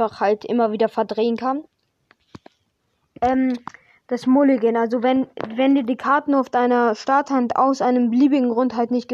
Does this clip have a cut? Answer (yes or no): no